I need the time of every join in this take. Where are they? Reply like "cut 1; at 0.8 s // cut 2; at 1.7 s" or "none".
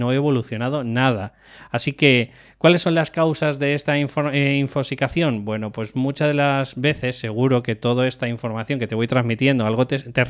none